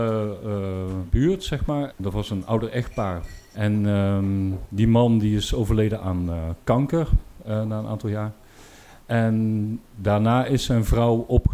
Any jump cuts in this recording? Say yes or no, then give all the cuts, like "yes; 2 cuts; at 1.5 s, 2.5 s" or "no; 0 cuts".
yes; 1 cut; at 1.9 s